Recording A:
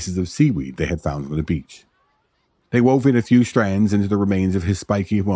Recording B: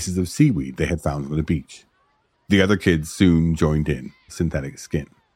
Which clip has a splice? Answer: B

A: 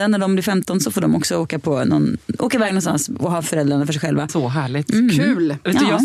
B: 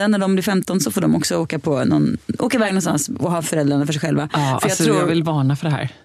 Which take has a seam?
A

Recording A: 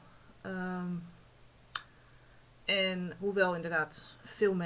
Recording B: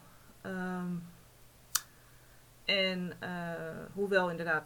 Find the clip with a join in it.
A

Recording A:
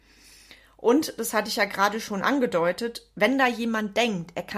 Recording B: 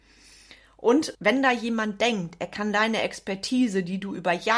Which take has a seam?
B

